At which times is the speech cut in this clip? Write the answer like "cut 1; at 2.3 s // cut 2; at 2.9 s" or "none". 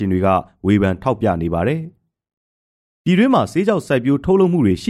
none